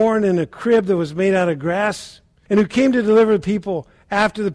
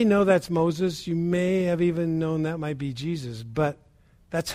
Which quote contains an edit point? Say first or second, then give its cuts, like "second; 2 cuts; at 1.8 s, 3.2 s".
first; 1 cut; at 2.5 s